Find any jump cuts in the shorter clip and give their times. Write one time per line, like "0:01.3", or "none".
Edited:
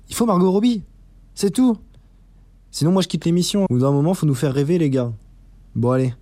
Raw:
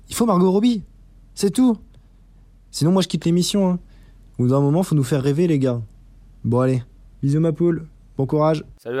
0:03.7